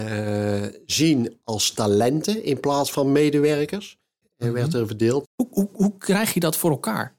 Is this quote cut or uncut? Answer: cut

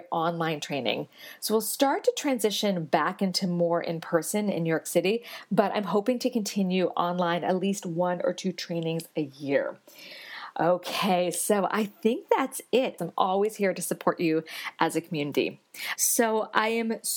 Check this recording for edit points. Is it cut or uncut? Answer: cut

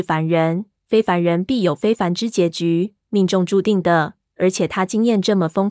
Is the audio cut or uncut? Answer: uncut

